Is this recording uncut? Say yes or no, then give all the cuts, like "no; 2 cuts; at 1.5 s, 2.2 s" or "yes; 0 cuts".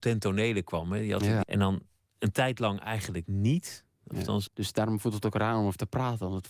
no; 2 cuts; at 1.4 s, 4.5 s